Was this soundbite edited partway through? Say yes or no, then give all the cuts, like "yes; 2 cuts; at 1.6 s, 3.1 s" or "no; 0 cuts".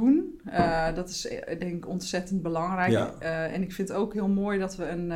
no; 0 cuts